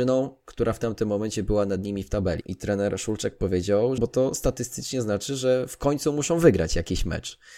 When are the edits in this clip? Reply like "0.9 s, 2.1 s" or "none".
2.4 s, 4.0 s